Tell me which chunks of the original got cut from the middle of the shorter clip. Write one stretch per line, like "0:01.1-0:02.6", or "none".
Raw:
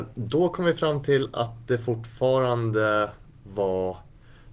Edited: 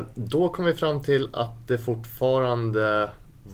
none